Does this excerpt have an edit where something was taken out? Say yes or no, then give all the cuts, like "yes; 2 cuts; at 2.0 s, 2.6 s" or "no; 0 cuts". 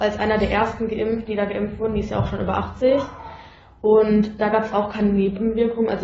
no; 0 cuts